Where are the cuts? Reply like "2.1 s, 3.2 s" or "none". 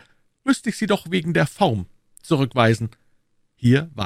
none